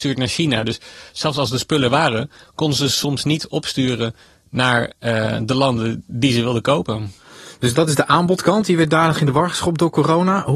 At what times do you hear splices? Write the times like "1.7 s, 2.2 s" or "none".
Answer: none